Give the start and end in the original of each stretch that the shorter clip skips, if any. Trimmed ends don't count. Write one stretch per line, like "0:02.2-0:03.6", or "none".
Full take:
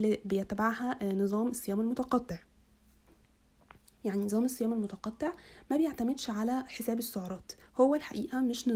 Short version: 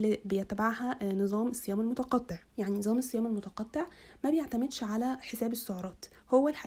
0:02.5-0:03.9